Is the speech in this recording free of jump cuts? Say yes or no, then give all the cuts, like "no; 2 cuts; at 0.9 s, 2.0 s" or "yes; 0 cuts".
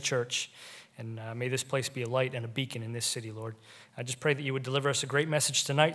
yes; 0 cuts